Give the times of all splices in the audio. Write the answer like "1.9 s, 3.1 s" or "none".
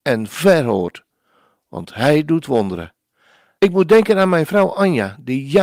3.6 s